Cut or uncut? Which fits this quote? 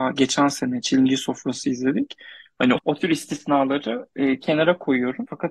cut